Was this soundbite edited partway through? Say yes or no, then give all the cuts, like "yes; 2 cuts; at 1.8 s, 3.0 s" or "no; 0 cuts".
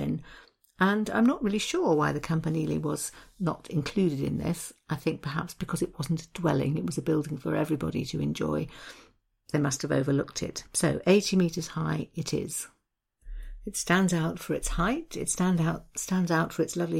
no; 0 cuts